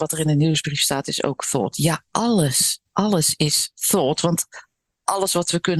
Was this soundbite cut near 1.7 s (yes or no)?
no